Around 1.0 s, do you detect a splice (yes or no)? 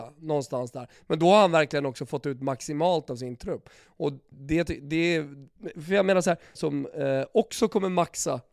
no